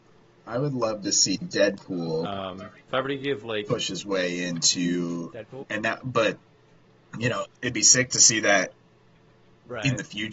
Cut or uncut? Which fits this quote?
cut